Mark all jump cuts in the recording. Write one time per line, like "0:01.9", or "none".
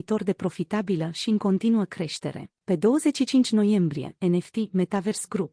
0:02.6
0:04.2